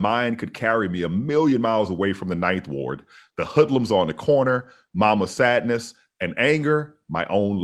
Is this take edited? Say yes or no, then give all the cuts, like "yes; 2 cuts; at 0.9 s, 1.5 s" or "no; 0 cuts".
no; 0 cuts